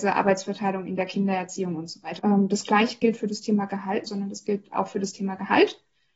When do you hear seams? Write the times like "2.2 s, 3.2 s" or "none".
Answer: 2.2 s, 4.1 s